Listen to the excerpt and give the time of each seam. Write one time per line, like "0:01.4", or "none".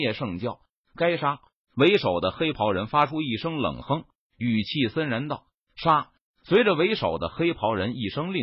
none